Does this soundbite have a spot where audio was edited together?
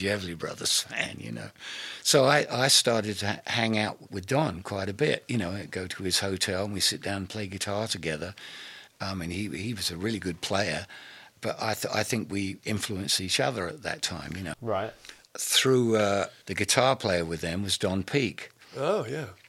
yes; 3 cuts; at 8.9 s, 14.5 s, 16.4 s

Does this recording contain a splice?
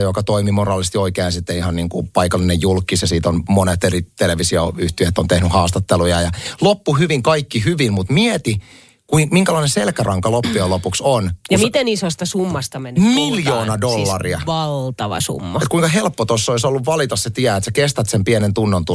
no; 0 cuts

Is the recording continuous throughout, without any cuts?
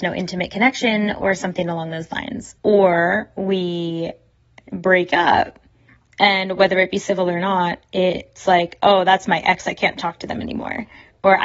no; 1 cut; at 2.6 s

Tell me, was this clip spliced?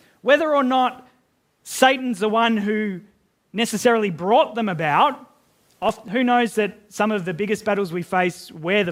no; 0 cuts

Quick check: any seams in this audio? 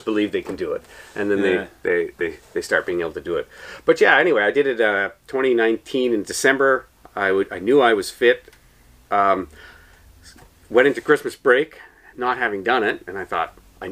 no; 0 cuts

